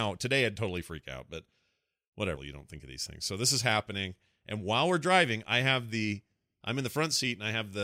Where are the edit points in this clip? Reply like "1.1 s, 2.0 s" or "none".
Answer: 2.4 s